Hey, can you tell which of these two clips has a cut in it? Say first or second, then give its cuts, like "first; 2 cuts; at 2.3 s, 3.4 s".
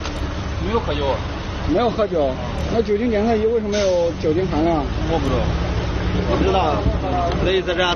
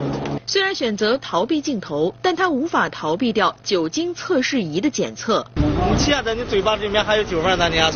second; 1 cut; at 5.6 s